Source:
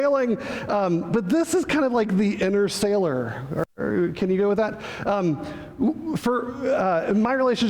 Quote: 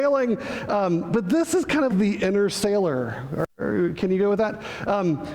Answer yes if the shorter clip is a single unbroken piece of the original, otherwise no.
no